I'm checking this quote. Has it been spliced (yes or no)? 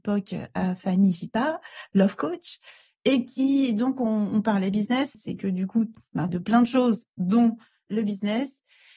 yes